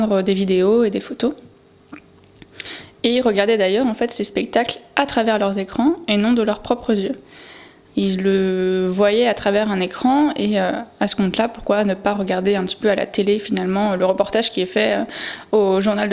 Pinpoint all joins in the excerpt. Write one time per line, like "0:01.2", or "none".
0:07.9